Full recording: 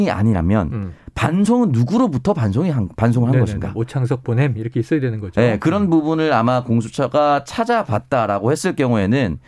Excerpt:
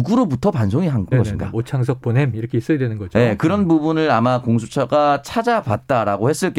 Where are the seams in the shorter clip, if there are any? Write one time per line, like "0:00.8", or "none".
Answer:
0:01.1